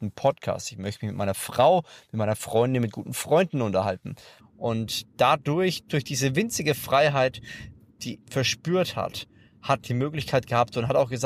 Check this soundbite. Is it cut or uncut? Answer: cut